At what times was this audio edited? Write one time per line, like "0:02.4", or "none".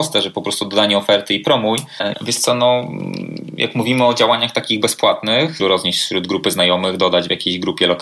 0:02.1
0:05.6